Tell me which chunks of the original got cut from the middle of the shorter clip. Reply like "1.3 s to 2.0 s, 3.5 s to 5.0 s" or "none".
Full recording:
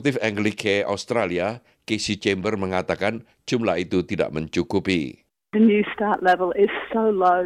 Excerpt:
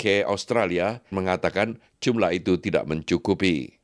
1.7 s to 2.6 s